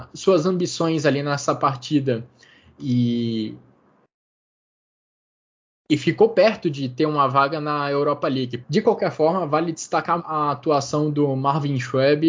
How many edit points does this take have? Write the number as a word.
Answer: two